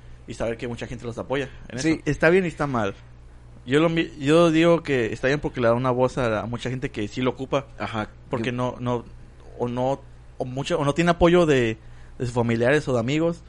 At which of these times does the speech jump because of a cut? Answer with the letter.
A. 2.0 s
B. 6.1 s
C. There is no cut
A